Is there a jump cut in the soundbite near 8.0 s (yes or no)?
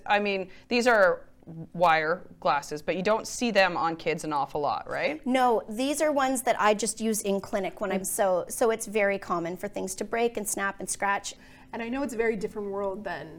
yes